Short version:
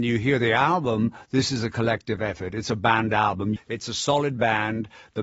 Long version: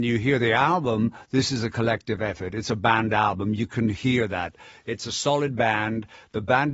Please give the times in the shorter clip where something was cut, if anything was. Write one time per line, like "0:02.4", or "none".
0:03.6